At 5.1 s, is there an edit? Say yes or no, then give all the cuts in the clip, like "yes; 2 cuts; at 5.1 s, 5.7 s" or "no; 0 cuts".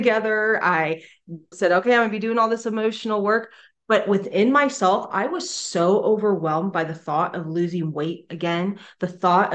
no; 1 cut; at 1.5 s